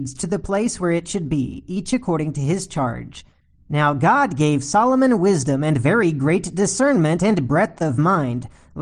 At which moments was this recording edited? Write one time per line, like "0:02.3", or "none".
none